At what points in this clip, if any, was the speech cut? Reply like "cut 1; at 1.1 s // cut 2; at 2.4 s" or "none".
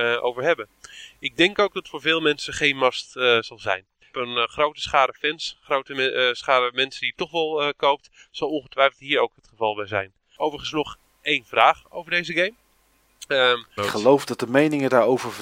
cut 1; at 4.0 s // cut 2; at 13.8 s